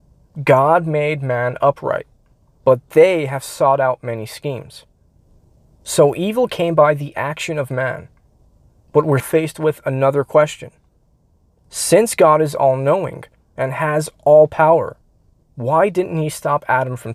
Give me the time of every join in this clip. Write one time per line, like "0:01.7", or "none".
0:09.2